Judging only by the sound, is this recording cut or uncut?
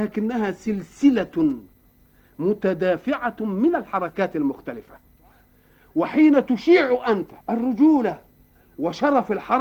cut